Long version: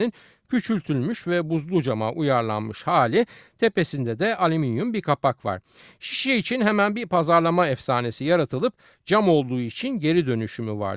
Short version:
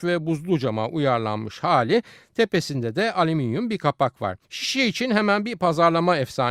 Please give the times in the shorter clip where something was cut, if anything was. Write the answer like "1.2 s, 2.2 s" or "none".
4.4 s